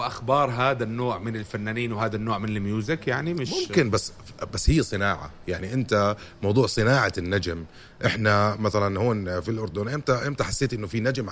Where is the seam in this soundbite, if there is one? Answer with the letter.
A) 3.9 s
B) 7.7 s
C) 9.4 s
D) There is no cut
C